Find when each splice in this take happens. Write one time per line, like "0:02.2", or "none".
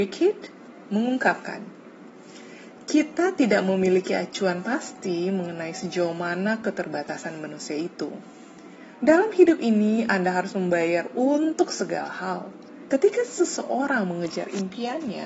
0:09.0
0:12.9